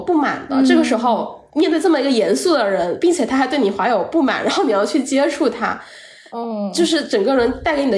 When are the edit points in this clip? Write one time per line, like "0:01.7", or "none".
none